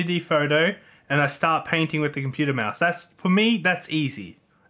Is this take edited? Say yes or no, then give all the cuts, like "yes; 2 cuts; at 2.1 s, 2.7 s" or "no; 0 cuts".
no; 0 cuts